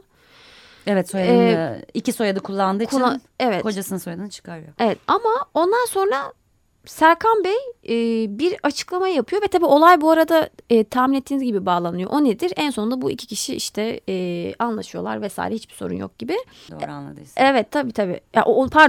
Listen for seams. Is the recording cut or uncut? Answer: cut